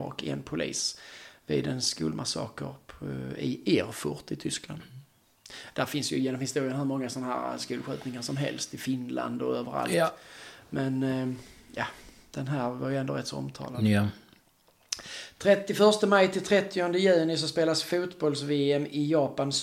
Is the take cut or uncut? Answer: uncut